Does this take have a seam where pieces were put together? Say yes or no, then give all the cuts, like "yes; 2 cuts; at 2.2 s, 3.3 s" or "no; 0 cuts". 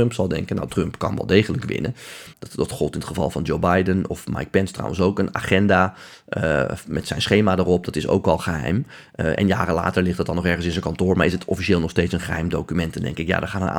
yes; 1 cut; at 2.3 s